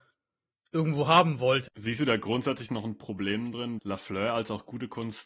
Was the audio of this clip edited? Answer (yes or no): yes